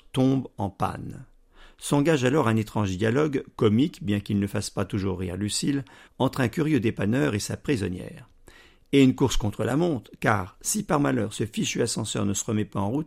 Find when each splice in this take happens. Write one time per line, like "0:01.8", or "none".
none

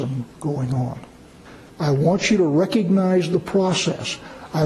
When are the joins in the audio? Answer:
0:01.7

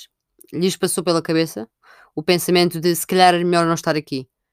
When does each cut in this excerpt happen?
none

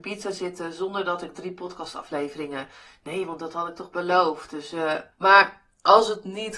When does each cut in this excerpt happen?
0:05.1

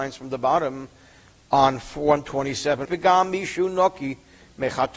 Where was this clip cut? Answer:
0:02.8

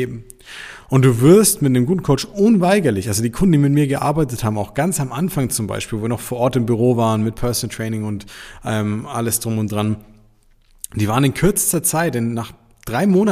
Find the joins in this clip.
none

